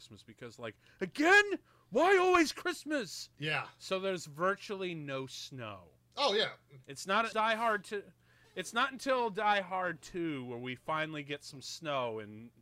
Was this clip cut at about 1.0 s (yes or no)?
no